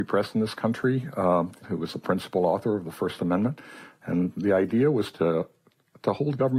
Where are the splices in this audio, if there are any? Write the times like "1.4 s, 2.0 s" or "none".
1.6 s